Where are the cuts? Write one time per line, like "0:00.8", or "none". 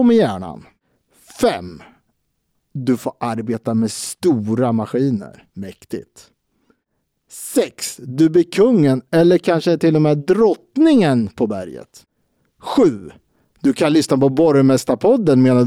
0:05.5